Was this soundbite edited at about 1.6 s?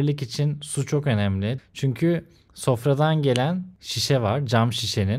yes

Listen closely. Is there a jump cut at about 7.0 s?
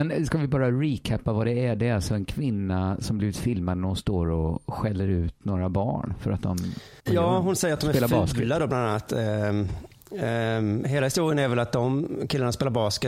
yes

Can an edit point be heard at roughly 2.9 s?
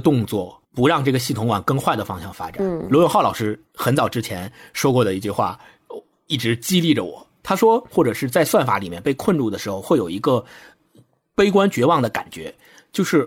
no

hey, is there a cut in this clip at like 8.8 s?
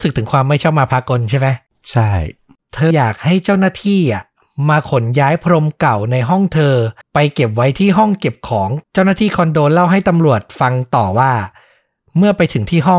yes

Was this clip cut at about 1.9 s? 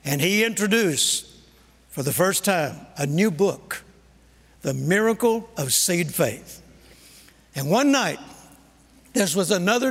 no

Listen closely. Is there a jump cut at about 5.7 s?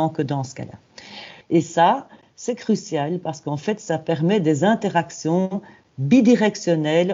no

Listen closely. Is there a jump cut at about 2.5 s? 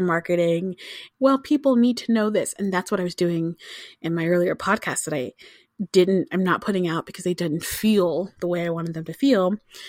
no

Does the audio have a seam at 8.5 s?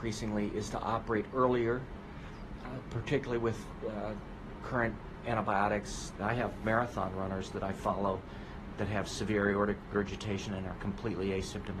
no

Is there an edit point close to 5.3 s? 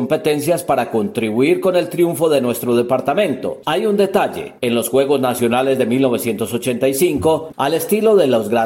no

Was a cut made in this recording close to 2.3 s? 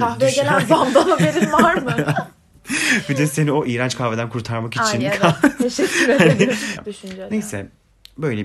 no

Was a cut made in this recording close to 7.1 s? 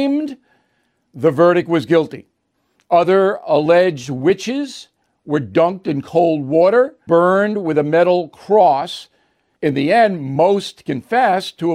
yes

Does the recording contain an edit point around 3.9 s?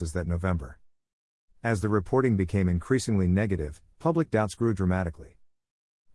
yes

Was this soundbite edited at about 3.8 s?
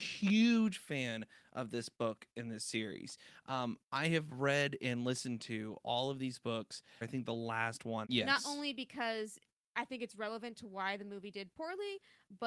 no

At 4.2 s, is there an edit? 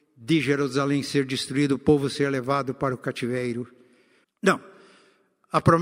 yes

